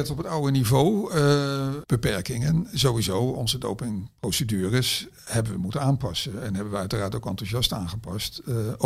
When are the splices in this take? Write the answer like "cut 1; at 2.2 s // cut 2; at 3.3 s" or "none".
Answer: cut 1; at 1.8 s